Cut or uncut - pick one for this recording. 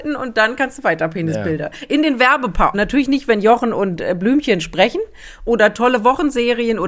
cut